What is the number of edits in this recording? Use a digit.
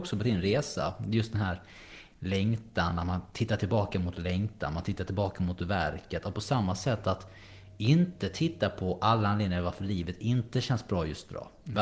0